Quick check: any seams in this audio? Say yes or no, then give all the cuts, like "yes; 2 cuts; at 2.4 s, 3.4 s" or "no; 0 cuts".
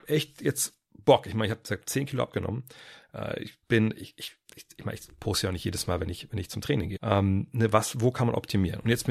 yes; 2 cuts; at 3.6 s, 7.0 s